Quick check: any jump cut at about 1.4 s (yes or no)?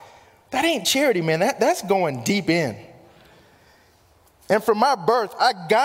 no